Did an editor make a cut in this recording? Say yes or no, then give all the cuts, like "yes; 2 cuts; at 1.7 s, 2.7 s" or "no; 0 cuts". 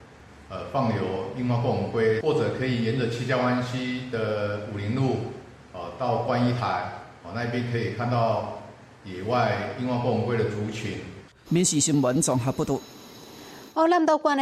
yes; 1 cut; at 11.5 s